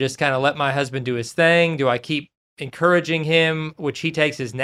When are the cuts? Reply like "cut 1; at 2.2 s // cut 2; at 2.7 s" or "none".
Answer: none